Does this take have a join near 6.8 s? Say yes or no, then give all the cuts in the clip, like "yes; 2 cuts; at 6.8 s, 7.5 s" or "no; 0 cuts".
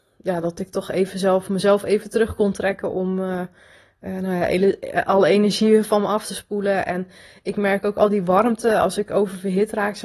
no; 0 cuts